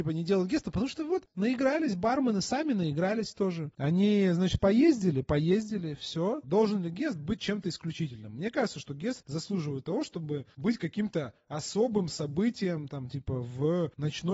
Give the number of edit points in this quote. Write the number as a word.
one